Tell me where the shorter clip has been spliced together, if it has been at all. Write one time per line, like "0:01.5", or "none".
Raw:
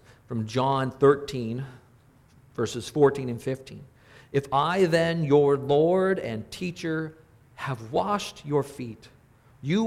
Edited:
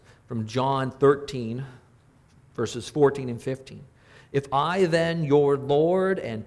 none